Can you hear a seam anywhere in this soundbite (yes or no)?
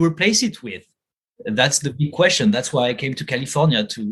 no